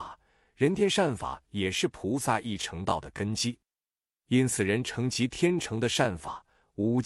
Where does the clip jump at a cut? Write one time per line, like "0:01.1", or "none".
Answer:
none